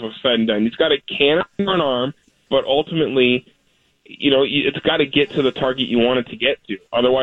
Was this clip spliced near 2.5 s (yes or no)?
yes